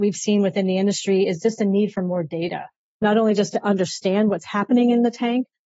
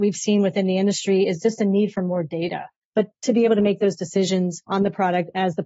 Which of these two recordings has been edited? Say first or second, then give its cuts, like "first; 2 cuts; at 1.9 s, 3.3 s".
second; 1 cut; at 2.8 s